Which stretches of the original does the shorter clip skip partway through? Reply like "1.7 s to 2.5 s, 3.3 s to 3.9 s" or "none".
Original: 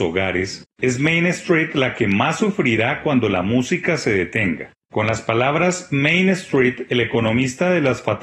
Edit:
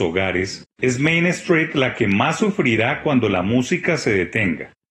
none